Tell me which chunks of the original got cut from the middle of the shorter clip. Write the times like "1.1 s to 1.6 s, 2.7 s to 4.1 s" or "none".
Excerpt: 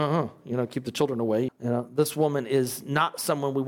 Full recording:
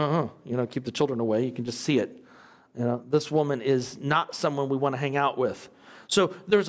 1.5 s to 2.6 s